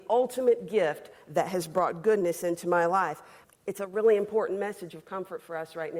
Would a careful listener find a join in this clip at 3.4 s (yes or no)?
yes